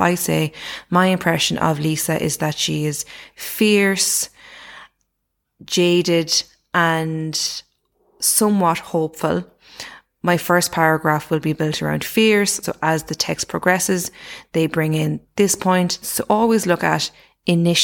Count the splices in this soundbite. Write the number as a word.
two